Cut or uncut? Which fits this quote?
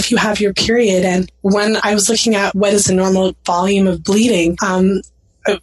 uncut